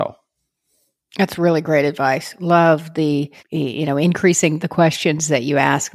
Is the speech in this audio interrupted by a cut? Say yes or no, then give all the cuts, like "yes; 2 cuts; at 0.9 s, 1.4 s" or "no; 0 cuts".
yes; 2 cuts; at 3.4 s, 4.6 s